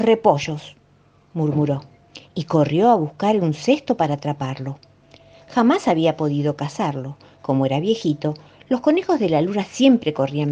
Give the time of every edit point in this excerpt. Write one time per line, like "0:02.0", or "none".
none